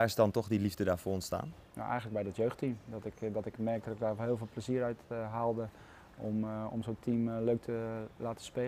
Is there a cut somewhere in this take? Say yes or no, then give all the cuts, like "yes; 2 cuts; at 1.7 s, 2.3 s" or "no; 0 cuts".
no; 0 cuts